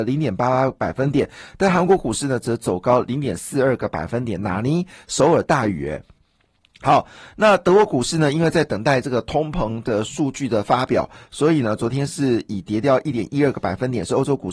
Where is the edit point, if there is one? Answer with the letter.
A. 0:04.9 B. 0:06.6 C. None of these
C